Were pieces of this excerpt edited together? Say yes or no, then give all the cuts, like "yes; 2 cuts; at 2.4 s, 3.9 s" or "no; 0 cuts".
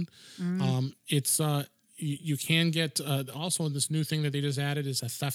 no; 0 cuts